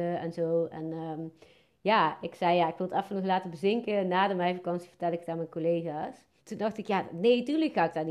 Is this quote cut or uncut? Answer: cut